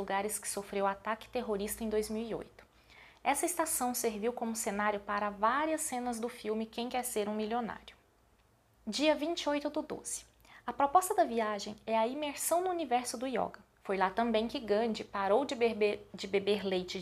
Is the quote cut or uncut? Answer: cut